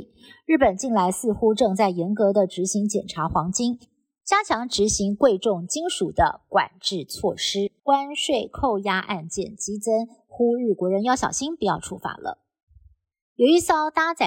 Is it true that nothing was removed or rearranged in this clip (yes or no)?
no